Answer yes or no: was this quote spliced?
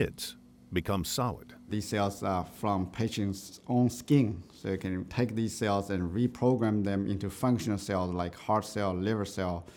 no